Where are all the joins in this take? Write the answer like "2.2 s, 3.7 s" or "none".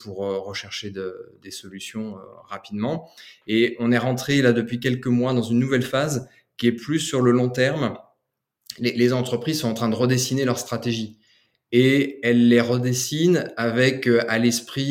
none